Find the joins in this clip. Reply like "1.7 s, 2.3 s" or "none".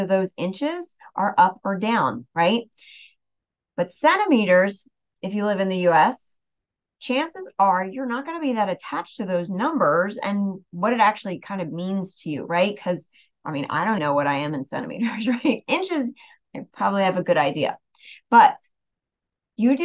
14.0 s